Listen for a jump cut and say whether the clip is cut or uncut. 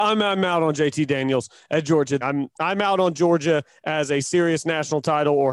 cut